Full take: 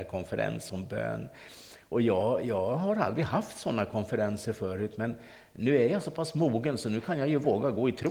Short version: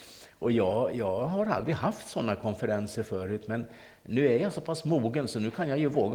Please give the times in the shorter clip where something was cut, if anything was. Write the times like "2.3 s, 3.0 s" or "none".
none